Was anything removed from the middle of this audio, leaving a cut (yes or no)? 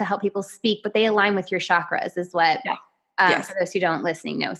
no